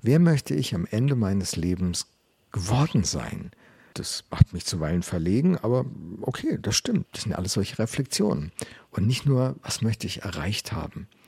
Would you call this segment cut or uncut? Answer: cut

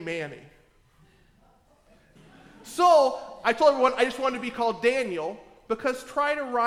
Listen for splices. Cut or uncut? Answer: cut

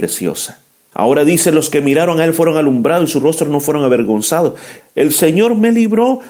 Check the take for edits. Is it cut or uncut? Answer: cut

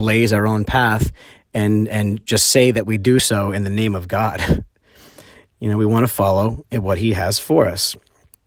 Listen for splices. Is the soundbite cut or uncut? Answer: uncut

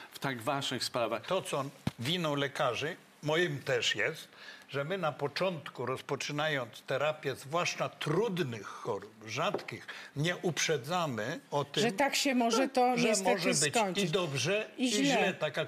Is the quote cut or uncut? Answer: uncut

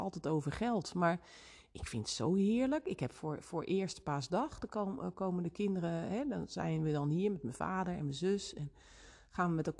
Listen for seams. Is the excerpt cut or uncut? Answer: uncut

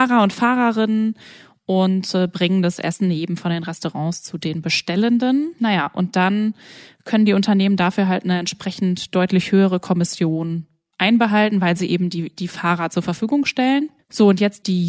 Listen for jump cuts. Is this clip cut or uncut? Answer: uncut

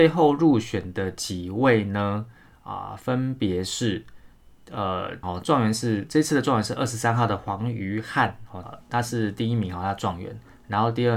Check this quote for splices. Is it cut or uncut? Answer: cut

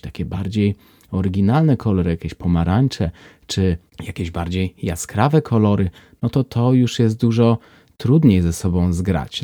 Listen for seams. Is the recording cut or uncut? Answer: uncut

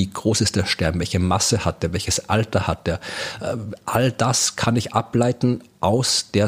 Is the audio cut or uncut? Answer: uncut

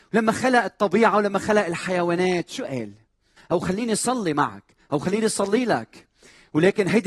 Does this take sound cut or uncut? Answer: cut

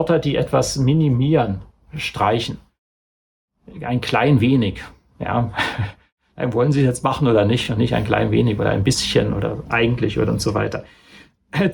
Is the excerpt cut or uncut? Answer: uncut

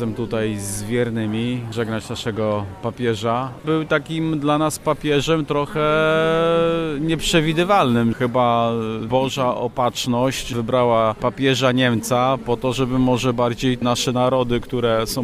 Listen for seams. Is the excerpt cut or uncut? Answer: uncut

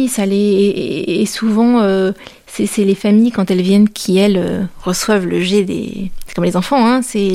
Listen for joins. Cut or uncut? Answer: uncut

